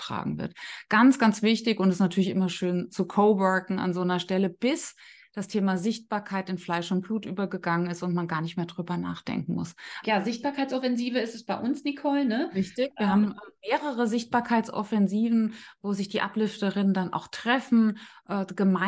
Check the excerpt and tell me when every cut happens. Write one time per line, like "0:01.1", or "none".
0:02.9
0:10.0